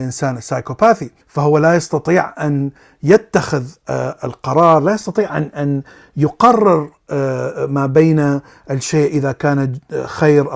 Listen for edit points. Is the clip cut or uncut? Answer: cut